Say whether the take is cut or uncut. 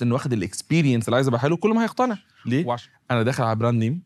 uncut